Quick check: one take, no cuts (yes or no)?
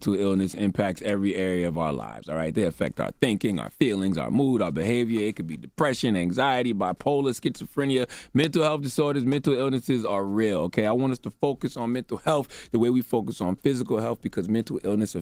yes